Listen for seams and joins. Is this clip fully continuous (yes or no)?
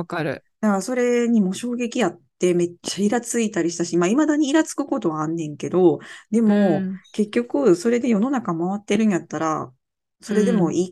yes